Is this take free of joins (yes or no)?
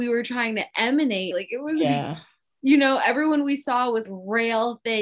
no